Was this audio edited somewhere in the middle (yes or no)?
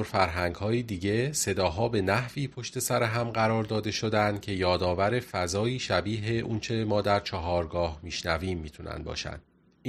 no